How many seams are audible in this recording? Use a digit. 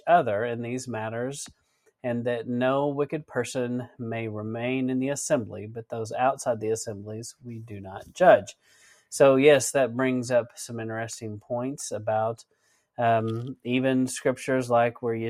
0